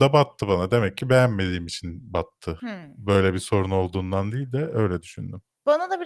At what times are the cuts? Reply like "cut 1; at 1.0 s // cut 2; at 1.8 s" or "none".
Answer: cut 1; at 2.6 s